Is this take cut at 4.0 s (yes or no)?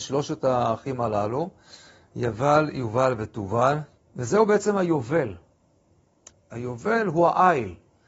yes